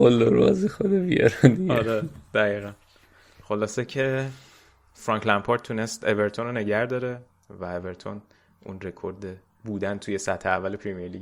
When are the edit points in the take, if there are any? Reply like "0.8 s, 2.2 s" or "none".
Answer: none